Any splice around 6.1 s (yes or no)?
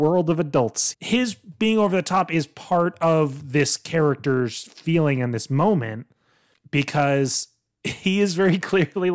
no